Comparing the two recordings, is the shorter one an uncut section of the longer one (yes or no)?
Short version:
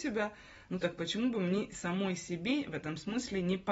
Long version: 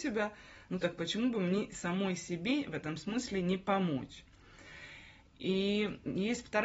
yes